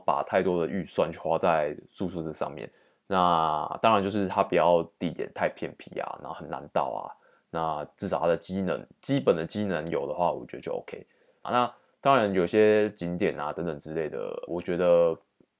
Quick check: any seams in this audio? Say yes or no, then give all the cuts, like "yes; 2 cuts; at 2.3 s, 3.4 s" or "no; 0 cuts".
yes; 2 cuts; at 11.4 s, 14.5 s